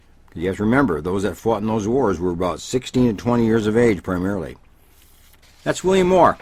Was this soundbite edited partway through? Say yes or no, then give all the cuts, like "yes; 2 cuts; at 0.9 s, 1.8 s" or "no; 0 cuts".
yes; 1 cut; at 5.4 s